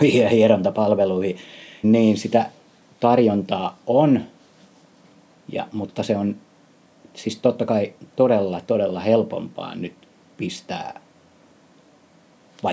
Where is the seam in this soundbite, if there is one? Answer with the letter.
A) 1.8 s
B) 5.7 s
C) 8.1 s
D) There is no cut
A